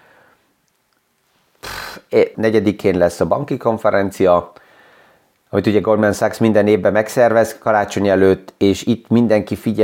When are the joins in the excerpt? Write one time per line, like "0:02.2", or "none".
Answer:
0:02.3